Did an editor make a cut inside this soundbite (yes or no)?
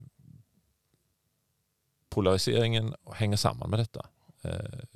no